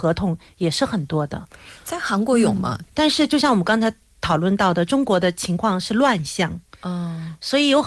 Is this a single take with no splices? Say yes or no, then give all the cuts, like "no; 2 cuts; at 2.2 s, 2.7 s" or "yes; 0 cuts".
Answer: no; 1 cut; at 2.9 s